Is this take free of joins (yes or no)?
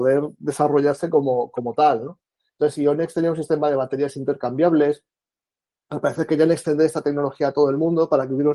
yes